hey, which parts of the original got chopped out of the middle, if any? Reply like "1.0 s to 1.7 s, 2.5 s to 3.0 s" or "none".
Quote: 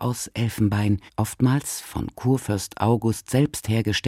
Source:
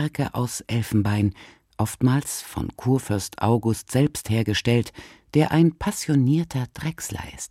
1.4 s to 1.7 s